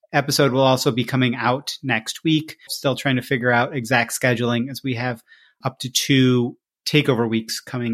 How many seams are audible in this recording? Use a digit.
2